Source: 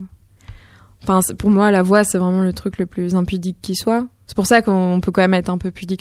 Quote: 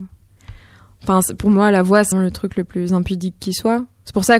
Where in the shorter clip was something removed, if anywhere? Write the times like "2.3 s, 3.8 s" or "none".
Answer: 2.1 s